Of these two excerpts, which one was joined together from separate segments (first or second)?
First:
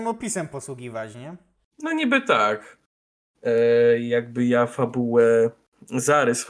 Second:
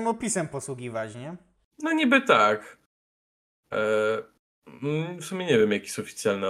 first